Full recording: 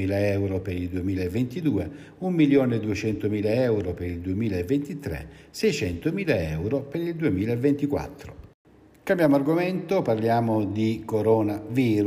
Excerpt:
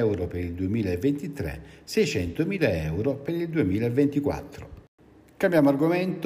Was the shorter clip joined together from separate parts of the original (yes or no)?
no